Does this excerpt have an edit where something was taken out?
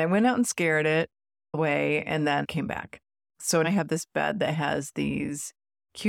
yes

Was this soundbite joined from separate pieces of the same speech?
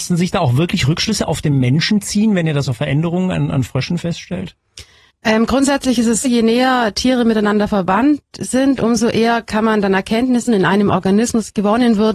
yes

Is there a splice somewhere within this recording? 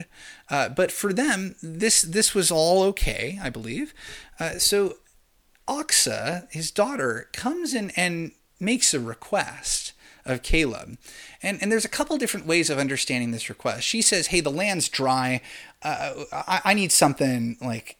no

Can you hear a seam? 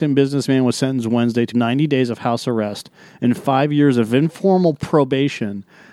yes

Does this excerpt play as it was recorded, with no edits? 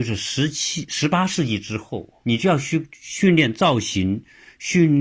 no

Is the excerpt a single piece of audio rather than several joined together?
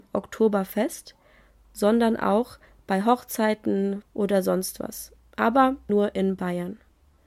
no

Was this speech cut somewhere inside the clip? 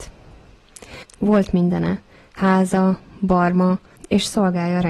yes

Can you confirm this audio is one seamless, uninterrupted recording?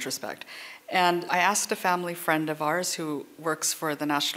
no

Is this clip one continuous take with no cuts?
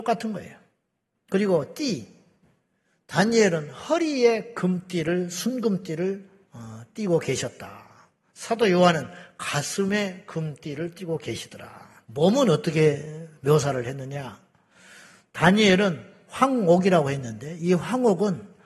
no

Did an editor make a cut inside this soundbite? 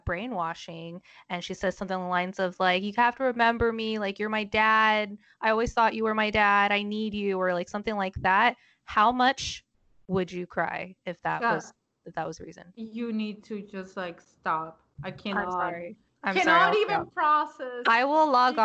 no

